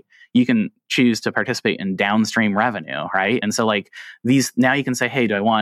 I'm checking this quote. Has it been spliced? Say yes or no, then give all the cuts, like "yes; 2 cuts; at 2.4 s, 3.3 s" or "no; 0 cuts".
no; 0 cuts